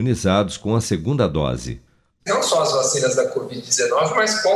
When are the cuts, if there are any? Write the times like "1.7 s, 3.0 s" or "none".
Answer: 2.2 s